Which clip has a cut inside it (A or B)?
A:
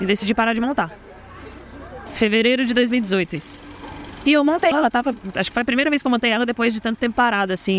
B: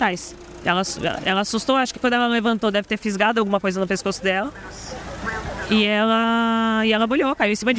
A